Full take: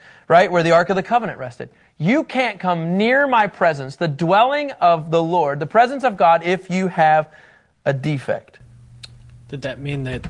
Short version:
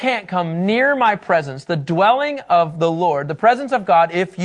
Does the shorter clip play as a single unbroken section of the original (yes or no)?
yes